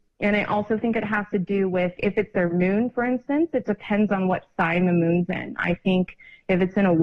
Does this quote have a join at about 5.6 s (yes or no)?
no